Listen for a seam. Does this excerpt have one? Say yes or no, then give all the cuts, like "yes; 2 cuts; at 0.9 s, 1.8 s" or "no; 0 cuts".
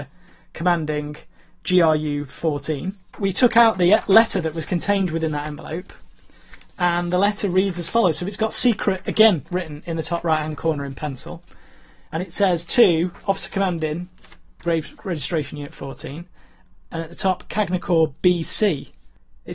yes; 1 cut; at 14.6 s